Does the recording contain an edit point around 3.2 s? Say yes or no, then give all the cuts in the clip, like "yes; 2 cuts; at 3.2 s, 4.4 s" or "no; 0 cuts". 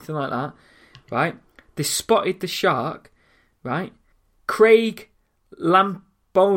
no; 0 cuts